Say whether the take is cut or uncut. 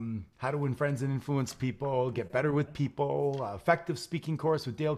uncut